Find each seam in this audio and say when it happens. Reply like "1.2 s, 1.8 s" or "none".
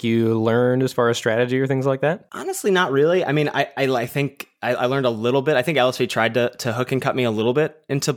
none